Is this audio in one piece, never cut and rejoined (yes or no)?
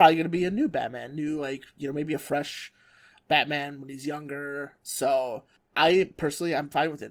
yes